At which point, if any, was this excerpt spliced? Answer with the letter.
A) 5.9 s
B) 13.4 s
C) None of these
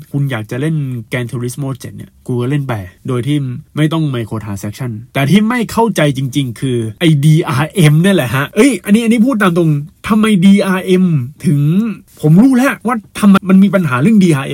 B